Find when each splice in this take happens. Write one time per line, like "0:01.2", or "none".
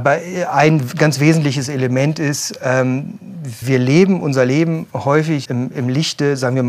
0:03.6
0:05.4

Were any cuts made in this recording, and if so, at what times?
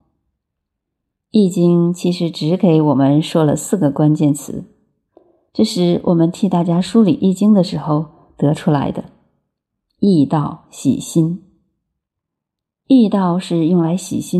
none

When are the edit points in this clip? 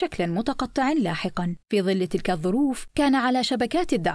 0:01.6

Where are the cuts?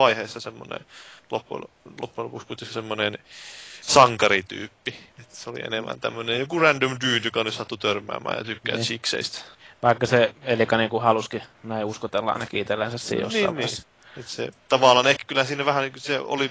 none

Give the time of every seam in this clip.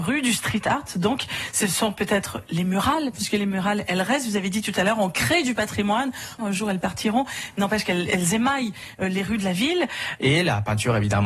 0:06.4
0:10.2

